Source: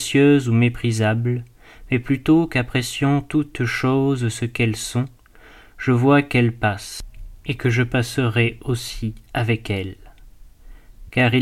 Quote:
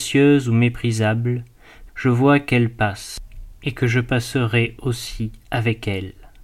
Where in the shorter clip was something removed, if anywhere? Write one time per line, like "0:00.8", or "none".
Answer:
0:01.9